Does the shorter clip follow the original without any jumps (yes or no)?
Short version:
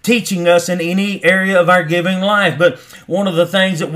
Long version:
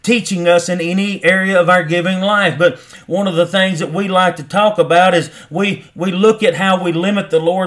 yes